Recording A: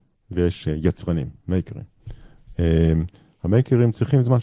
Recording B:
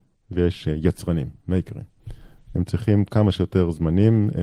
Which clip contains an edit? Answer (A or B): B